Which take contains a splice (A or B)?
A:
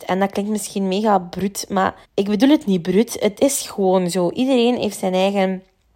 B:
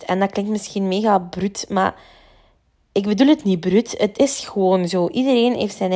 A